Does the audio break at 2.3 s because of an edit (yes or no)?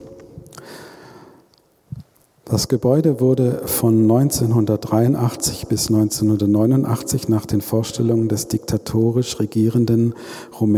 no